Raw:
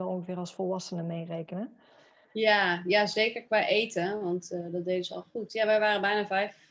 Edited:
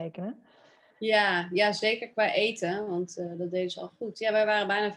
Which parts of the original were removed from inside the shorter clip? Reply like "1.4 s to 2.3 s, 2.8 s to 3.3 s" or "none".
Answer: none